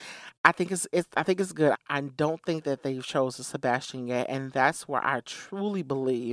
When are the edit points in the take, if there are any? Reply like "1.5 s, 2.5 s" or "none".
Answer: 1.7 s